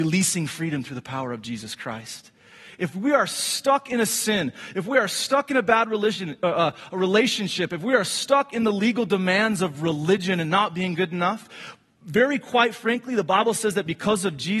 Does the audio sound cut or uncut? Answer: uncut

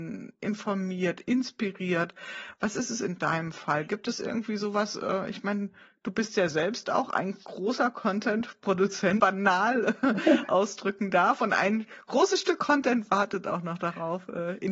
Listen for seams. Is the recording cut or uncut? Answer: cut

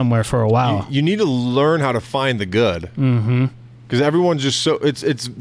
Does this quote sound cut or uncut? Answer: uncut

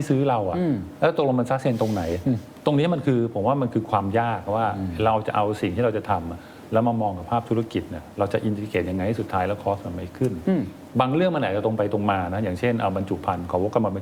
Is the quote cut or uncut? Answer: uncut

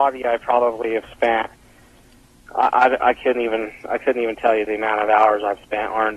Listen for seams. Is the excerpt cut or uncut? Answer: uncut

